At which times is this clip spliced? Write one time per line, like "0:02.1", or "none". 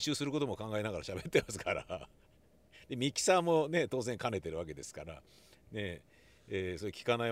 none